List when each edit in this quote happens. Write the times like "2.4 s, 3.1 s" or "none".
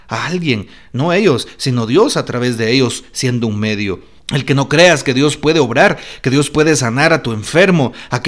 4.2 s